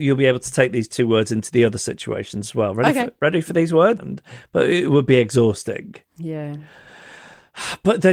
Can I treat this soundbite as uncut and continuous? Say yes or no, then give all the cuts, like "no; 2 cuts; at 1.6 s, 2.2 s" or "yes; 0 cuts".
no; 1 cut; at 4.0 s